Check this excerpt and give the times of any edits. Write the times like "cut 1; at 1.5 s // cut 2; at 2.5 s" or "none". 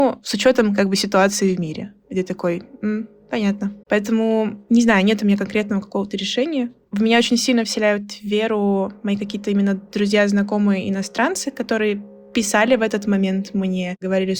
cut 1; at 3.8 s